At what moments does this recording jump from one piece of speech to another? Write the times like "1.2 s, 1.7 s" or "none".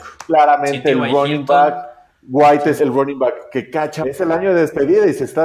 2.8 s, 4.0 s